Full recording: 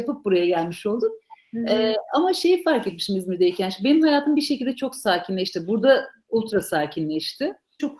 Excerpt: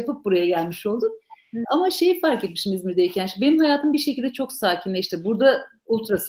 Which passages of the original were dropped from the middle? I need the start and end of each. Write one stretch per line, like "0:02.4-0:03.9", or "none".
0:01.6-0:02.1